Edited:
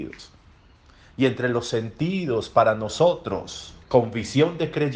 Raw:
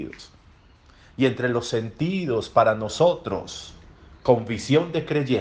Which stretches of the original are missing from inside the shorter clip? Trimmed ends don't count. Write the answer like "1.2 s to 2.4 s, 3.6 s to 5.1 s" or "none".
3.8 s to 4.2 s